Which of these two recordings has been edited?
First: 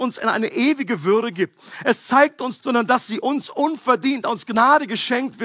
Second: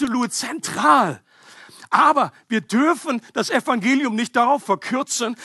first; 1 cut; at 2.6 s

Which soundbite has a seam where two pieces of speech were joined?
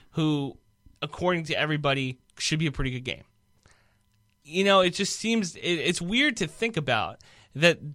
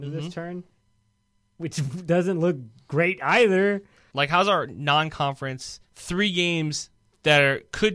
second; 2 cuts; at 4.1 s, 5.8 s

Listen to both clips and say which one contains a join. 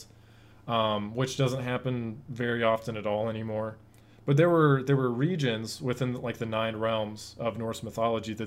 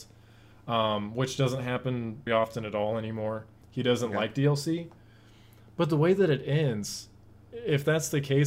second; 2 cuts; at 2.3 s, 3.6 s

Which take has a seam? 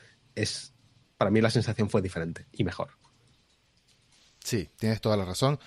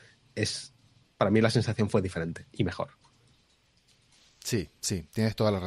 first; 1 cut; at 4.8 s

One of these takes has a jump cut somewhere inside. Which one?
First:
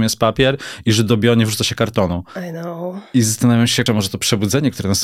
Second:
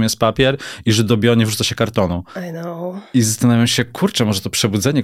first; 1 cut; at 3.9 s

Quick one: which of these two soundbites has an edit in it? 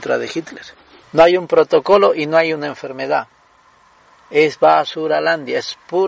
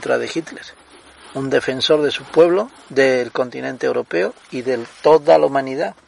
first; 1 cut; at 1.0 s

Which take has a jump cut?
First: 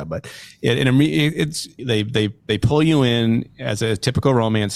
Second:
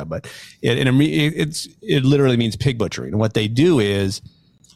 first; 1 cut; at 1.8 s

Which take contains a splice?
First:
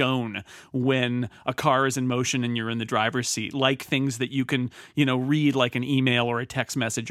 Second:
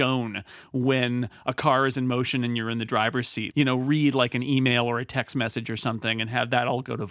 second; 1 cut; at 3.5 s

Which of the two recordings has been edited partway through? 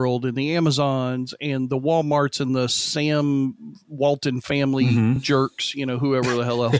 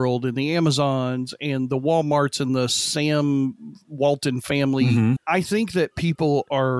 second; 1 cut; at 5.2 s

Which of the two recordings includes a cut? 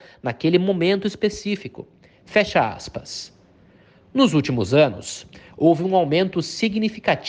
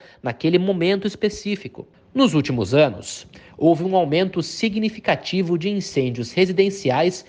second; 1 cut; at 1.9 s

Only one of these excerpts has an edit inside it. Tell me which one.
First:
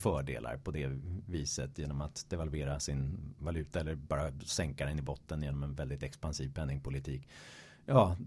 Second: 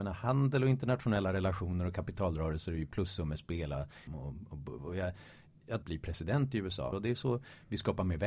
second; 3 cuts; at 4.1 s, 5.8 s, 6.9 s

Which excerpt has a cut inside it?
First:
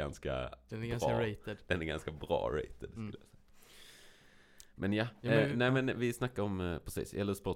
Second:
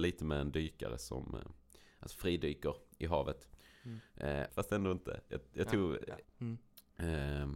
second; 2 cuts; at 4.5 s, 6.2 s

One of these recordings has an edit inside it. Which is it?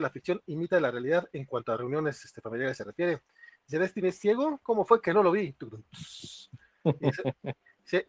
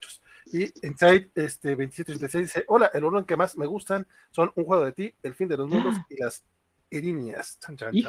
first; 1 cut; at 4.6 s

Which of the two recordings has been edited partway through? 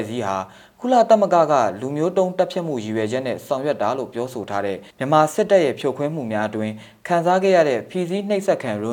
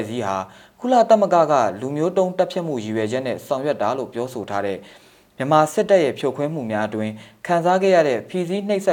first; 1 cut; at 4.9 s

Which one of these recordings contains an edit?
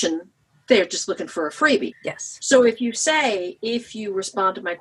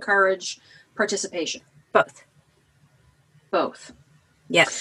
first; 1 cut; at 1.9 s

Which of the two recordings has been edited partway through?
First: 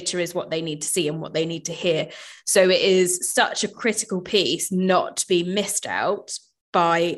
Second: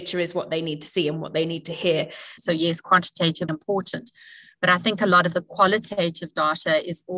second; 2 cuts; at 2.4 s, 3.5 s

